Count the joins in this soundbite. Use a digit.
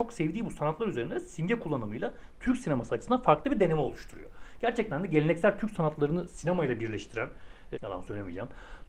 1